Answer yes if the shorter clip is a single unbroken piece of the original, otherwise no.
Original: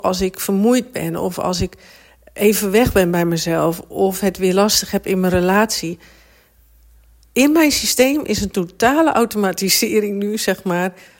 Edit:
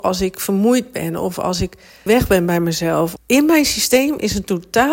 no